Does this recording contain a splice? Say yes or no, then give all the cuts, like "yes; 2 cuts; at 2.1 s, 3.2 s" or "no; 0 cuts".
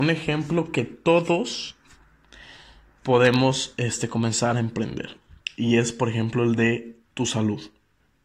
yes; 1 cut; at 7.0 s